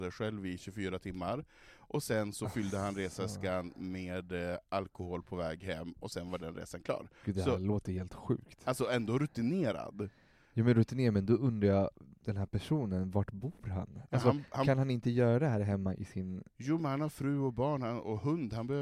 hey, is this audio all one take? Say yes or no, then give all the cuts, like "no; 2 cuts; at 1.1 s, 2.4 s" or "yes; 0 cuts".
yes; 0 cuts